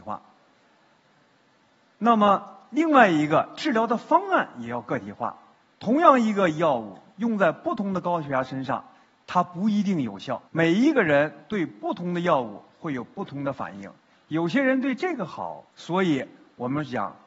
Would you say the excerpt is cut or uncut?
cut